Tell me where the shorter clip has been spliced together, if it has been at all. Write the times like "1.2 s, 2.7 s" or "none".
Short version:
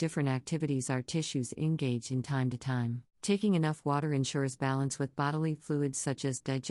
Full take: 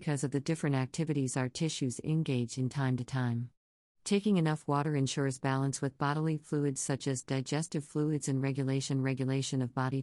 3.1 s